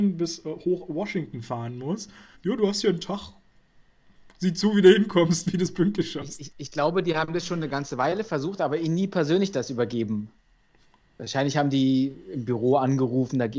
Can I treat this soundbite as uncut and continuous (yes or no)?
no